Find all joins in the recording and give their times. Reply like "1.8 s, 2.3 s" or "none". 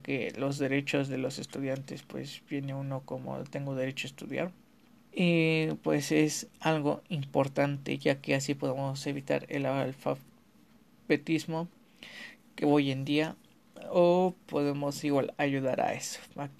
5.1 s